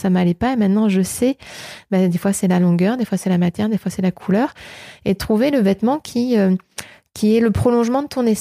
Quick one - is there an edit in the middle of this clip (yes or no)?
no